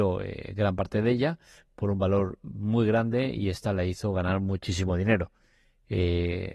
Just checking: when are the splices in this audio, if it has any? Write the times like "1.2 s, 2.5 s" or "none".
none